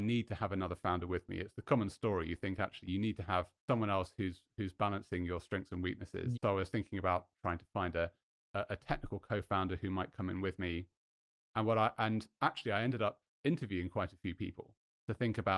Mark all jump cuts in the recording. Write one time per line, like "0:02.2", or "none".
0:03.6
0:06.3